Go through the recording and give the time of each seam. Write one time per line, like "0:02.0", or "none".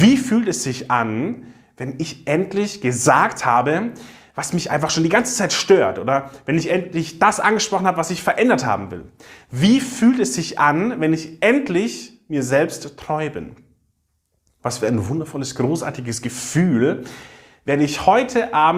none